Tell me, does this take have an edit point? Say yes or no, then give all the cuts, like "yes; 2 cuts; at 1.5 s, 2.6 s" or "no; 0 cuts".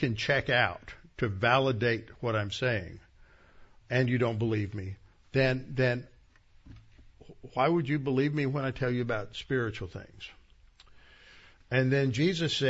yes; 1 cut; at 3.8 s